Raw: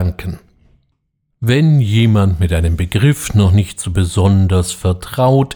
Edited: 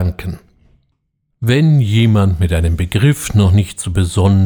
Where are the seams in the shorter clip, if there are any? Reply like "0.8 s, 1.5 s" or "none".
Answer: none